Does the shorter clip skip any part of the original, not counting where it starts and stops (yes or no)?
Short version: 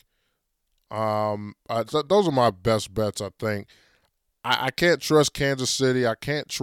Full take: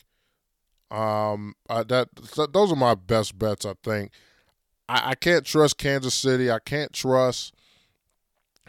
yes